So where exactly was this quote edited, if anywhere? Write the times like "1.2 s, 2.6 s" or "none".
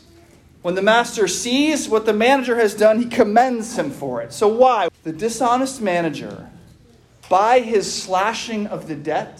4.9 s

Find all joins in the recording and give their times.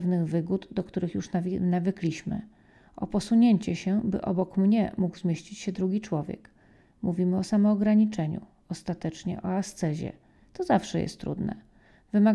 none

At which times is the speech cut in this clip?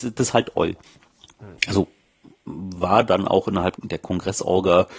1.6 s, 3.8 s

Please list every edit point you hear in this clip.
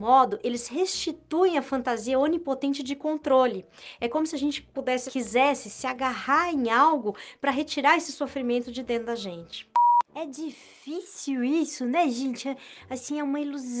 5.1 s

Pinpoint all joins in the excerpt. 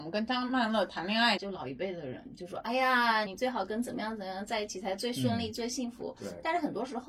1.4 s, 3.3 s

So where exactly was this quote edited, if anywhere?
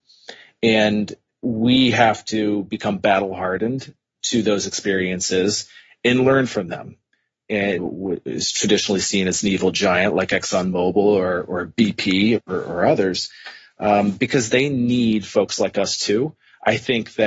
7.8 s

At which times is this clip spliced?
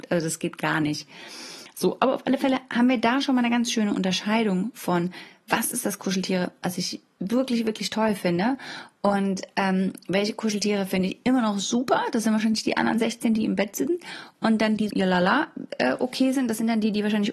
14.9 s

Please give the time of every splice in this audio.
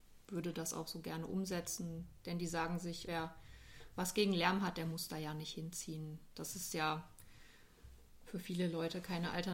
3.1 s

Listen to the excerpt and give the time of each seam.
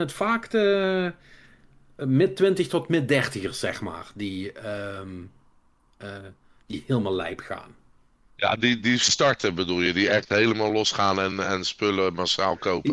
none

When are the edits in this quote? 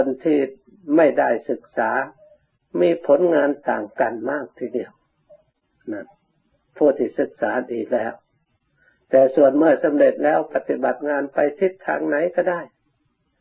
10.5 s

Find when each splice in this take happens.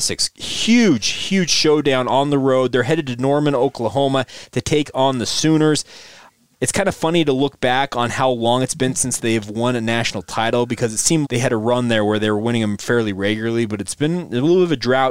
6.5 s, 11.2 s

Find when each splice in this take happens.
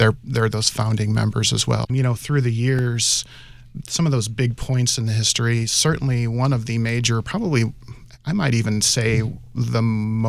1.9 s

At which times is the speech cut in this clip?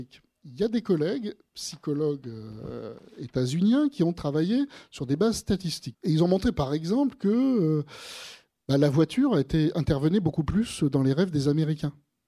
5.9 s

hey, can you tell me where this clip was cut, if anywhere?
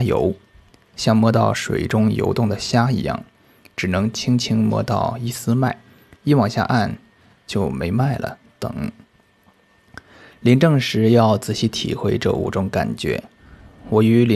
none

